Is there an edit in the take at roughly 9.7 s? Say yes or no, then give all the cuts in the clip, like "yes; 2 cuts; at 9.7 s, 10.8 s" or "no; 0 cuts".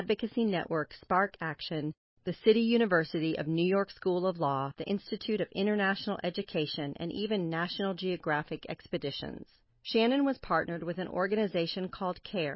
yes; 1 cut; at 9.7 s